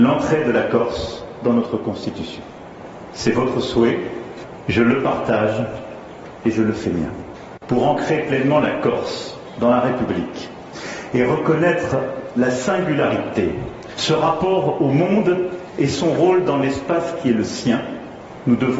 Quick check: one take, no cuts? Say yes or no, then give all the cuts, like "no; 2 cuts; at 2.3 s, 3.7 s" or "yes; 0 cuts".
no; 2 cuts; at 7.6 s, 14.0 s